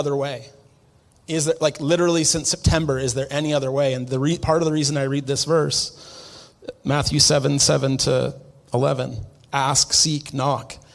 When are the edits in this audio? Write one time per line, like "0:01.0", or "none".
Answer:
none